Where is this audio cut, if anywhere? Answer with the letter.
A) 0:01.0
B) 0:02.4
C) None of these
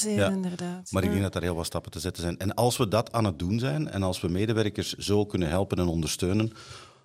C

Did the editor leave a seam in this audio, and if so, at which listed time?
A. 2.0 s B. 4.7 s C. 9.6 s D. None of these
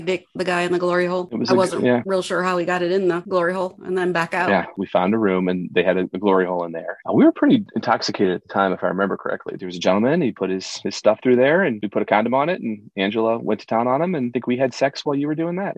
B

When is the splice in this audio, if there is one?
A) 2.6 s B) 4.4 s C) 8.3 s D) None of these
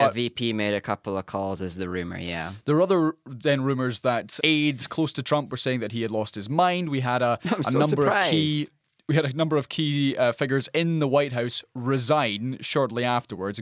B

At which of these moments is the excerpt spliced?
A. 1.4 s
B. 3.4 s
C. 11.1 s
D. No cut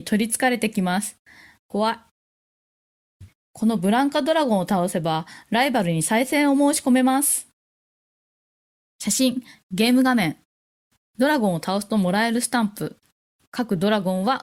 B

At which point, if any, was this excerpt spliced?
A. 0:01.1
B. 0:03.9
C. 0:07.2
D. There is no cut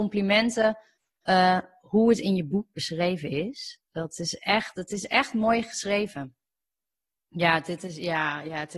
C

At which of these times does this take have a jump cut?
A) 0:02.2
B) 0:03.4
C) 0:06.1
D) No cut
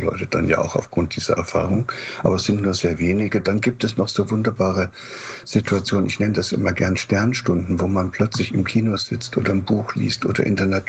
D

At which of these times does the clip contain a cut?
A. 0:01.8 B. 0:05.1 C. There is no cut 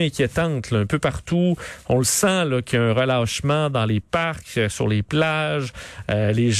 C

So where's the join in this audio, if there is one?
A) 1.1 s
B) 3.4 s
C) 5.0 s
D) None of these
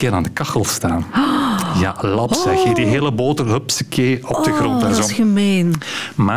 D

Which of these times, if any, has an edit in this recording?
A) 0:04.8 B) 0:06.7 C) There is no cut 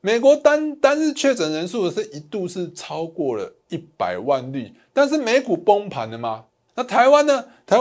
B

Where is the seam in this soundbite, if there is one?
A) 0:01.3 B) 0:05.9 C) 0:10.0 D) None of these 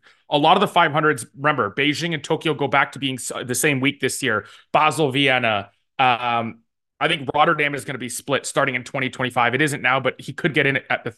D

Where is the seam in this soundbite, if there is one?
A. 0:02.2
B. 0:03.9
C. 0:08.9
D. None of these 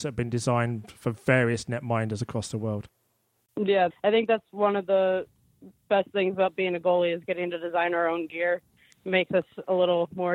B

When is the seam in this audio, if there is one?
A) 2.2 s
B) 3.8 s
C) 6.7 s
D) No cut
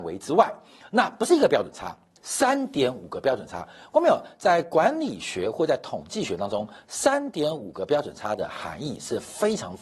A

